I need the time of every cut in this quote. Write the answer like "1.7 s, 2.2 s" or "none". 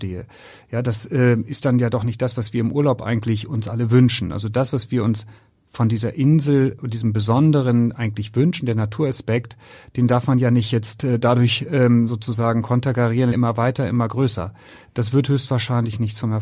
13.3 s